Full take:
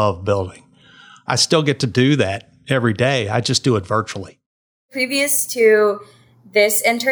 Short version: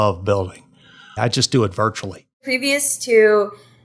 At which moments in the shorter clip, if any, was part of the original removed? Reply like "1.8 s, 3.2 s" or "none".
1.2 s, 2.3 s